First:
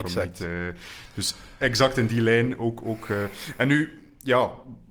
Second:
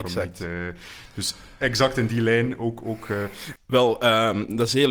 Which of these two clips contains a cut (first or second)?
second